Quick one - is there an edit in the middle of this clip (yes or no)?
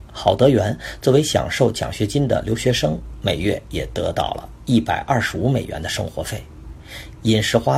no